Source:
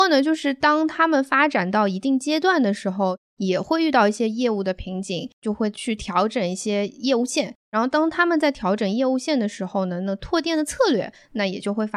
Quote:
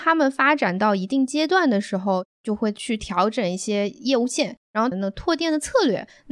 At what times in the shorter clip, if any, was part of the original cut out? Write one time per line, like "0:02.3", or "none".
0:02.4
0:04.9